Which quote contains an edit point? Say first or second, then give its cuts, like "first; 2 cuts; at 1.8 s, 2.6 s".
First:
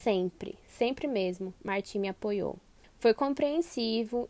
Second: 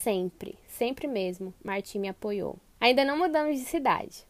second; 1 cut; at 2.8 s